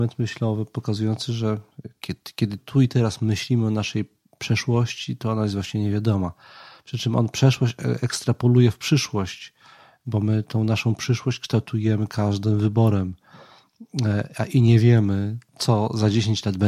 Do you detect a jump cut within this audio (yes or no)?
yes